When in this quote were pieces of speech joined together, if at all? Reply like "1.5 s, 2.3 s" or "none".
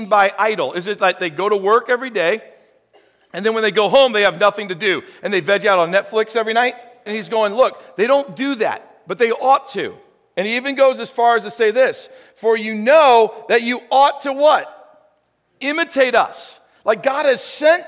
7.1 s